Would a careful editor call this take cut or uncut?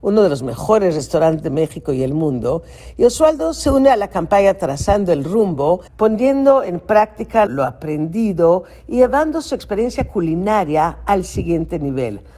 cut